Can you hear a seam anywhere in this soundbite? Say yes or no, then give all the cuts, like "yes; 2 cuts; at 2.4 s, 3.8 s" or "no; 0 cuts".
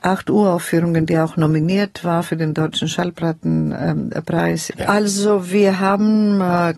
yes; 1 cut; at 4.7 s